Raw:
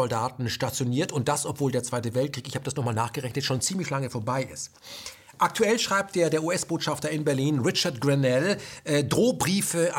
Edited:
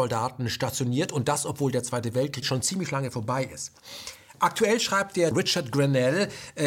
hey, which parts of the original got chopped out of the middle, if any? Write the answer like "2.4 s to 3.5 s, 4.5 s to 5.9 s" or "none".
2.4 s to 3.4 s, 6.3 s to 7.6 s